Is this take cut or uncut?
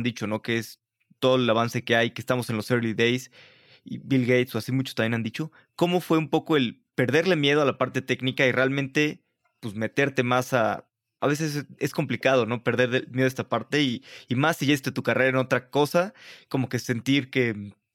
uncut